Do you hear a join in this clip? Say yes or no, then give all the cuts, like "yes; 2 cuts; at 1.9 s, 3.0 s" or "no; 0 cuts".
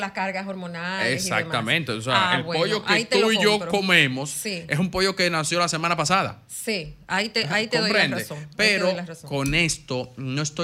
no; 0 cuts